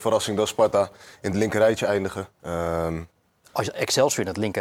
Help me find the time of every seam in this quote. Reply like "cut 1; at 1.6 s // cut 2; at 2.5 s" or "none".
cut 1; at 2.3 s